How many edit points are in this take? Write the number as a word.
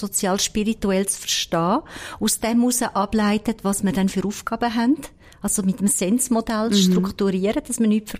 zero